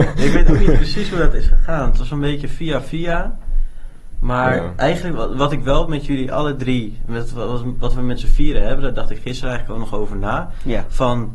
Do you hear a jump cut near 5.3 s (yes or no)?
no